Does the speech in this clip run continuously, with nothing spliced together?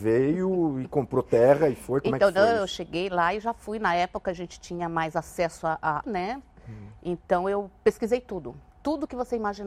no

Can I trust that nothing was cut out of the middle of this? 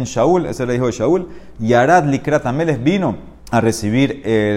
no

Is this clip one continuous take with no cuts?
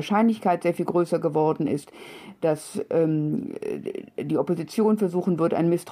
yes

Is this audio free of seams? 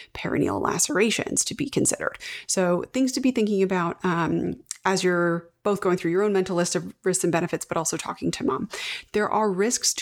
yes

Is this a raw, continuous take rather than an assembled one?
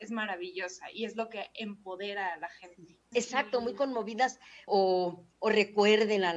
no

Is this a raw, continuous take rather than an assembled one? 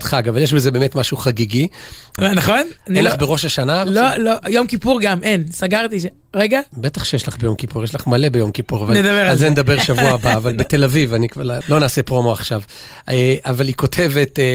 no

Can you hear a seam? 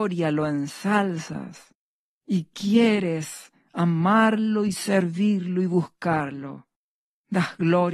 no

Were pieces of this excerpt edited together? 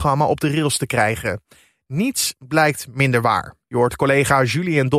no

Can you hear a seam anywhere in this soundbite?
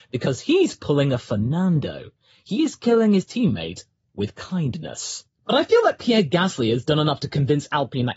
yes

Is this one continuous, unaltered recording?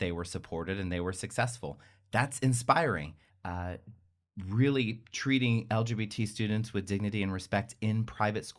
no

